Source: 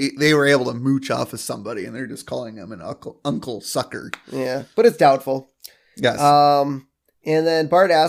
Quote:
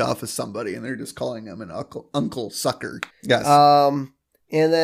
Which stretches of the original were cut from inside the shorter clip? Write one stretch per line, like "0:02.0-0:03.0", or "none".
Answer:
0:04.2-0:05.8